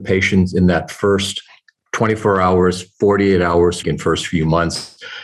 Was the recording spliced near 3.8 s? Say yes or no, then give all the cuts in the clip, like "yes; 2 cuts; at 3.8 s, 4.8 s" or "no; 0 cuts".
yes; 1 cut; at 3.8 s